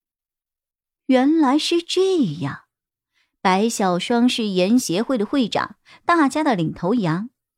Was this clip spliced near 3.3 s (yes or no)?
no